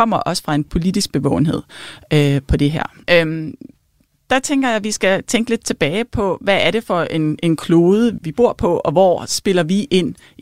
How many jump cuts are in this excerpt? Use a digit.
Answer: 2